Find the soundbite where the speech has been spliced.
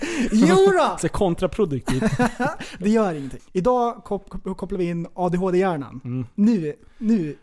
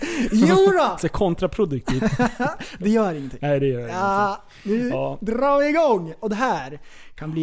first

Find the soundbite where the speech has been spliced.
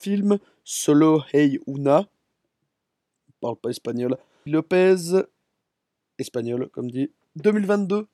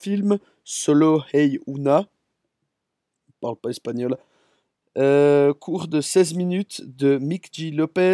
first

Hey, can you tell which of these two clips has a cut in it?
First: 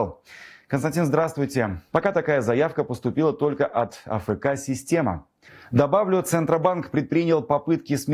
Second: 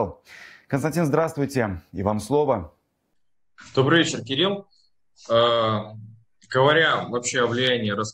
first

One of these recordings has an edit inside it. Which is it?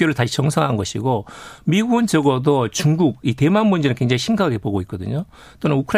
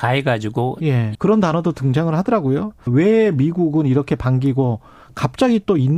second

